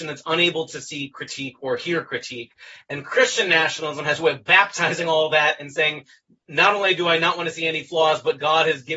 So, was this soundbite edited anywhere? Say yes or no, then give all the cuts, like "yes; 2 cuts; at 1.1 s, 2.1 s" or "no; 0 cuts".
no; 0 cuts